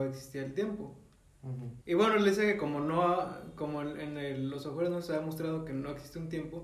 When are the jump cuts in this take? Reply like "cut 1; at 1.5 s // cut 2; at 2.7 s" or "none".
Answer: cut 1; at 1.8 s